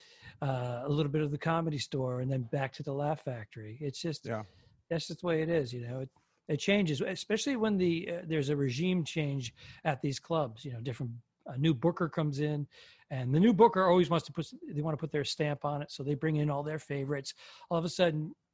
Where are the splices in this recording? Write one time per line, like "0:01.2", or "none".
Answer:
none